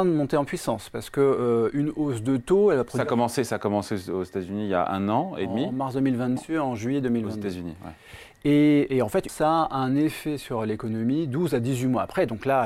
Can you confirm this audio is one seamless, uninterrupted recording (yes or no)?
no